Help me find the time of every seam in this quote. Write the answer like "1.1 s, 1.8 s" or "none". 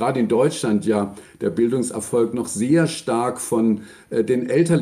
none